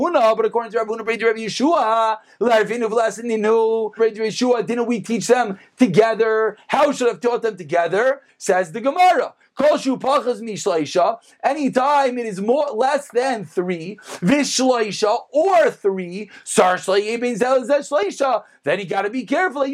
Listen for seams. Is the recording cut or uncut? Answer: cut